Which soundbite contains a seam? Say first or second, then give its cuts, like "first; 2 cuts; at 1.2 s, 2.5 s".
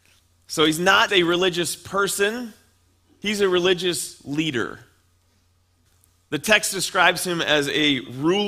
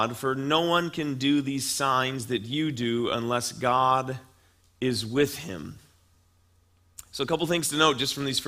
first; 1 cut; at 1.1 s